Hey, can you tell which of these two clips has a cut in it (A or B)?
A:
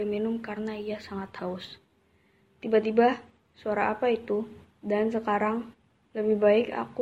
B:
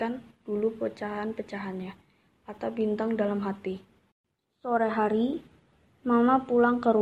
A